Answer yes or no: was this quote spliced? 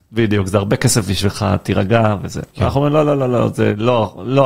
no